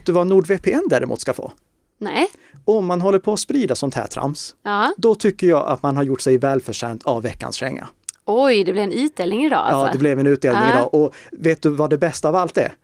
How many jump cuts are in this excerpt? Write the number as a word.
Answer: zero